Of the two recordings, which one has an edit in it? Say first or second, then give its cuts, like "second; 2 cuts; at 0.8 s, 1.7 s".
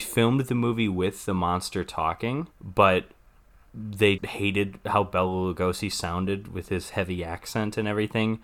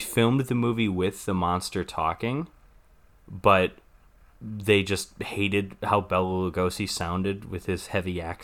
first; 2 cuts; at 2.5 s, 4.2 s